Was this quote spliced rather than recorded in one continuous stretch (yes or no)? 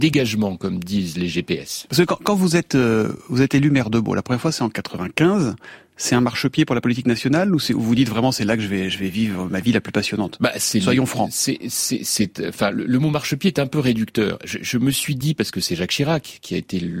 no